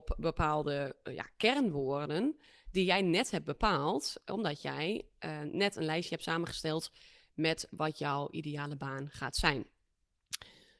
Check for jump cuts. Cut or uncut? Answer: uncut